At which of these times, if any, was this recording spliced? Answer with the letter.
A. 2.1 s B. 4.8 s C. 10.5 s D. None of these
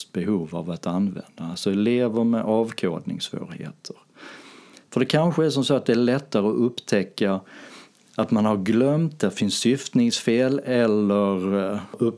B